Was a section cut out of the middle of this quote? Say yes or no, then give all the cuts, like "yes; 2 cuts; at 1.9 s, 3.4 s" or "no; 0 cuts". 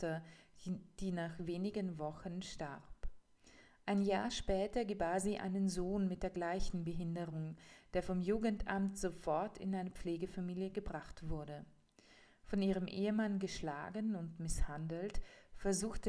no; 0 cuts